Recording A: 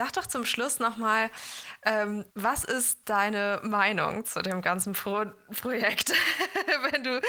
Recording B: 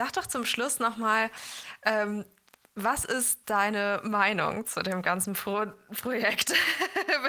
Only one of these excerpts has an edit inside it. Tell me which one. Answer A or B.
A